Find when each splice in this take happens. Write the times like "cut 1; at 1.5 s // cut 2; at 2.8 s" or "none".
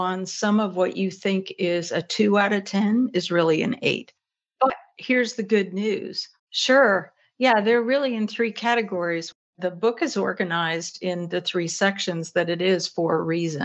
cut 1; at 6.4 s